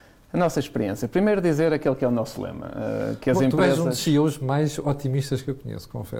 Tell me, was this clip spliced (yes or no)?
no